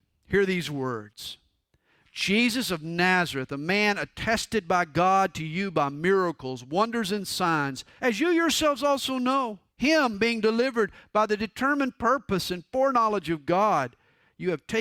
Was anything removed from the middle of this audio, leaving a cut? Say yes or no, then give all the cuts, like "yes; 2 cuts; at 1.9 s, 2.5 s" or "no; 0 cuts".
yes; 2 cuts; at 8.0 s, 9.7 s